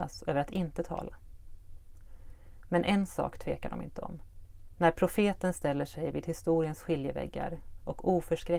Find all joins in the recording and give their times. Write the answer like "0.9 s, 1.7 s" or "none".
4.7 s